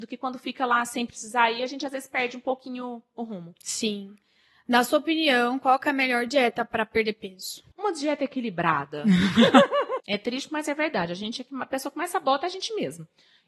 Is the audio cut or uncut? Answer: cut